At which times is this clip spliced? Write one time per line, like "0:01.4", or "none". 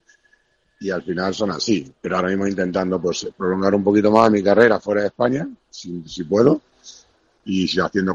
none